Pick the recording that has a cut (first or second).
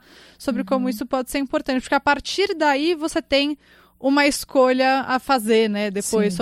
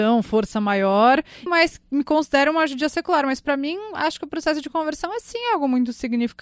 second